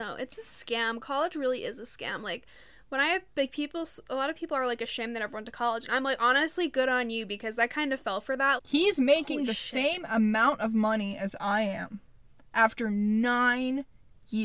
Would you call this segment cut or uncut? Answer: cut